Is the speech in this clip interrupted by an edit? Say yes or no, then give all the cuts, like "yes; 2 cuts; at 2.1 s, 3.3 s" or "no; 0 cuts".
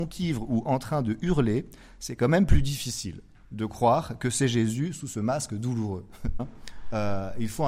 yes; 1 cut; at 6.4 s